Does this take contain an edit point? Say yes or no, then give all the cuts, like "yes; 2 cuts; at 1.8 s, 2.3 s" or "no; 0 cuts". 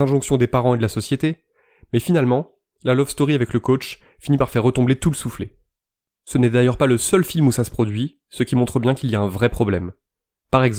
no; 0 cuts